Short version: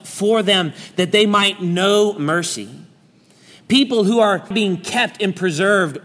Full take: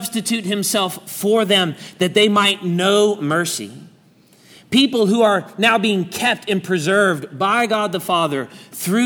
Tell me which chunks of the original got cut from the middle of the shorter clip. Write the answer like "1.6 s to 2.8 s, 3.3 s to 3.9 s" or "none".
5.5 s to 5.8 s